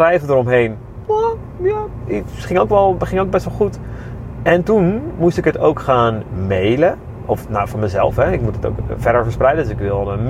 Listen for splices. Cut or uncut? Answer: cut